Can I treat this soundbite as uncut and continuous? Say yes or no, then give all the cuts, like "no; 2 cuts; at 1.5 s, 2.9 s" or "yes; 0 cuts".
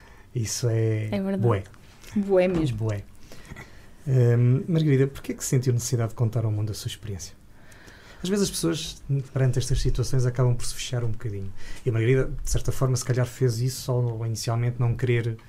yes; 0 cuts